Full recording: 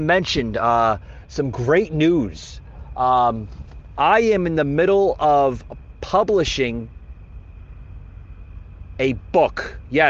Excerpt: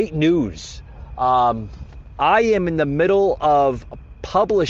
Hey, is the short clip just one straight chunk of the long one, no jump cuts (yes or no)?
yes